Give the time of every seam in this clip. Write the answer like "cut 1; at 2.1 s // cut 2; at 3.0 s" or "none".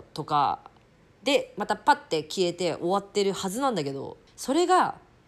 cut 1; at 4.3 s